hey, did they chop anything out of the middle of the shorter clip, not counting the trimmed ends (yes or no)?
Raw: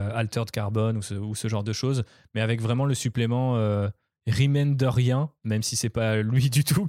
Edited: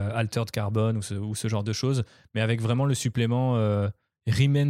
no